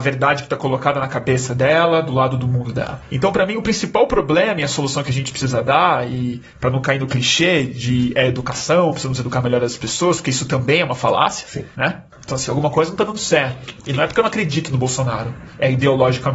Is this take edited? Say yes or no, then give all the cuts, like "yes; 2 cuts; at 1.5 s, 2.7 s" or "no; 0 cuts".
yes; 1 cut; at 12.1 s